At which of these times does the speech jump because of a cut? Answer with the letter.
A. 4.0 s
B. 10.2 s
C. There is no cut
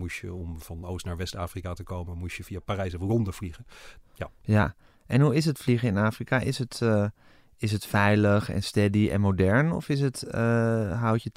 A